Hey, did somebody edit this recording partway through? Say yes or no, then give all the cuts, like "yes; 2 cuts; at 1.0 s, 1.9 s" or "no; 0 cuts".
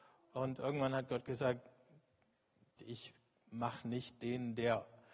yes; 1 cut; at 2.8 s